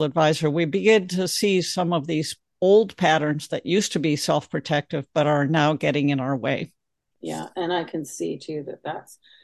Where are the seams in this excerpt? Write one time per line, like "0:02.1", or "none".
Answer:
0:07.1

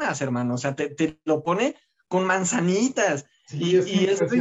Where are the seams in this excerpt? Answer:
none

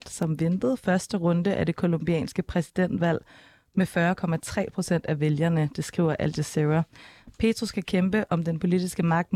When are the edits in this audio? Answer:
none

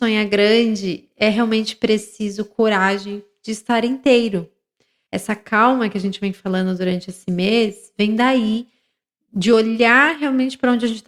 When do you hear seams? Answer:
0:05.1

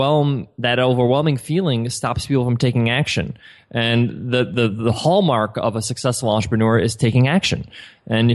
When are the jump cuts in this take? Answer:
none

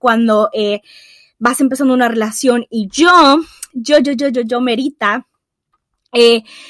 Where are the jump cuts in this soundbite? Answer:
none

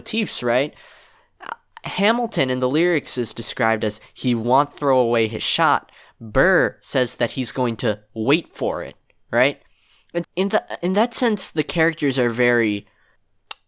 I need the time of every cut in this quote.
0:10.2

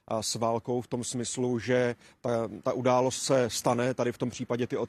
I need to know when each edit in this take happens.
none

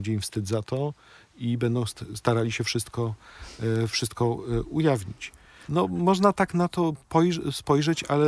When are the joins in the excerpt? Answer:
0:05.7

